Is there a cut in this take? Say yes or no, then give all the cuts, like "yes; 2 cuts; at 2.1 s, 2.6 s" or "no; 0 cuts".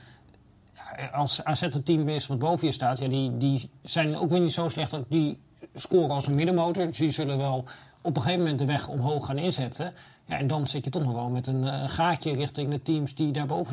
no; 0 cuts